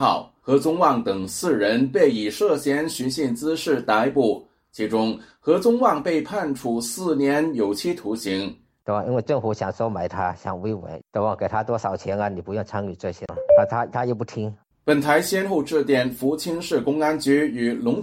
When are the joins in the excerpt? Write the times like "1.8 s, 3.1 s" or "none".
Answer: 8.8 s